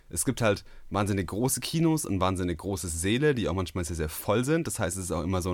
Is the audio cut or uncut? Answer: uncut